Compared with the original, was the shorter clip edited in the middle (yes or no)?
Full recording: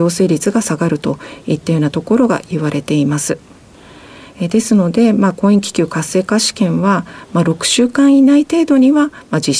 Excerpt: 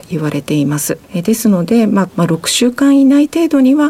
yes